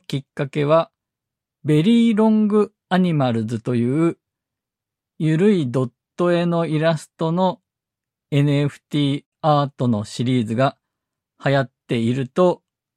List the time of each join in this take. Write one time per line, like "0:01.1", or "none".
none